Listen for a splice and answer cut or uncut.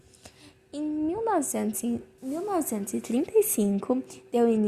cut